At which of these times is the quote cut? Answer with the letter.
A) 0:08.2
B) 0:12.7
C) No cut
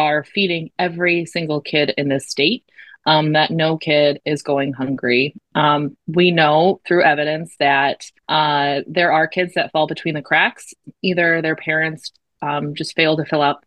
A